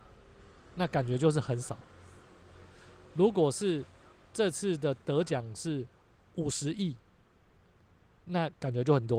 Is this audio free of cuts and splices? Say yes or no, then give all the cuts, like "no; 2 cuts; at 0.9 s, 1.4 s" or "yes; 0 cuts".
yes; 0 cuts